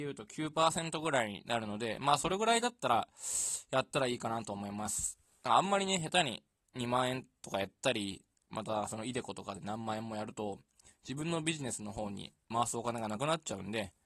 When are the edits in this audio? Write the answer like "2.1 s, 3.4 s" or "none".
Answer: none

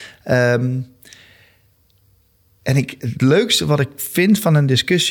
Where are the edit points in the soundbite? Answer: none

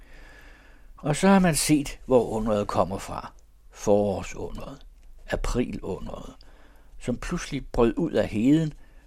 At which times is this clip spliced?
none

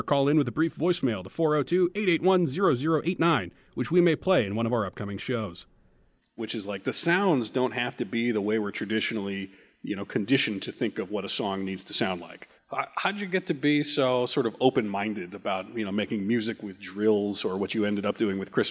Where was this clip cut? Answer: 6.4 s, 12.6 s

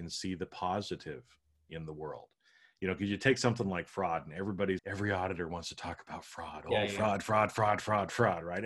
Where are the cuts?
4.8 s

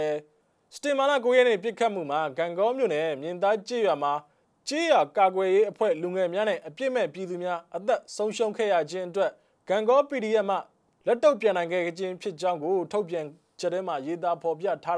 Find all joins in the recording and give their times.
none

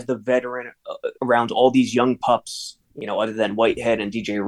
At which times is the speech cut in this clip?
2.8 s

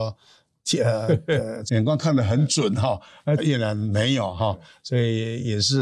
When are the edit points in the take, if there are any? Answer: 1.7 s, 3.4 s

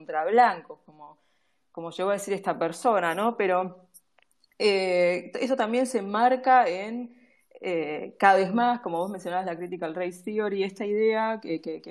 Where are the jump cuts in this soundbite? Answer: none

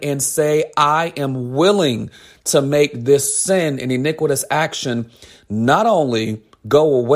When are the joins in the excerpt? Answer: none

